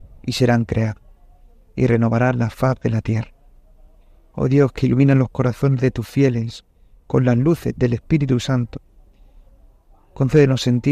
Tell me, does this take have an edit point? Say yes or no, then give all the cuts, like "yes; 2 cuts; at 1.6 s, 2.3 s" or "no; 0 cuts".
no; 0 cuts